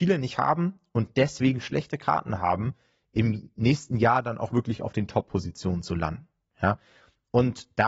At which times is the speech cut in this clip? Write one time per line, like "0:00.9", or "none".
none